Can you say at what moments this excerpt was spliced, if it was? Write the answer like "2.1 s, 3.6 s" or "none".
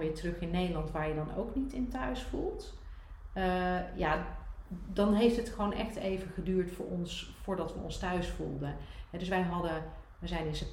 none